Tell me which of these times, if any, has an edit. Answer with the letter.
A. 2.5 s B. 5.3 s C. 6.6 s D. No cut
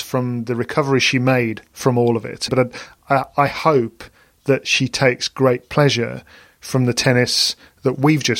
A